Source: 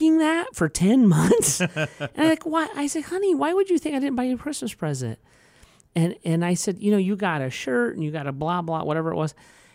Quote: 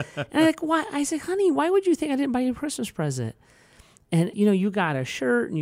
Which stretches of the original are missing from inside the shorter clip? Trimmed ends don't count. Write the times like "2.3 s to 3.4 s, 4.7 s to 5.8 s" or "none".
6.2 s to 6.8 s